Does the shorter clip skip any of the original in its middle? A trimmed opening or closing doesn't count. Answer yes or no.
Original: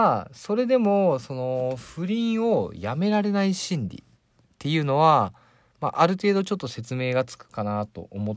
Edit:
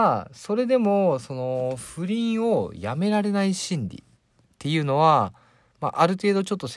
no